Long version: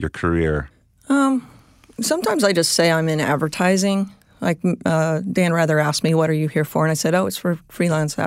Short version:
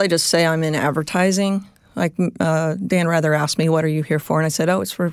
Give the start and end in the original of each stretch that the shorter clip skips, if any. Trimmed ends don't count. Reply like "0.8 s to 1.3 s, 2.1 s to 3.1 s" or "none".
none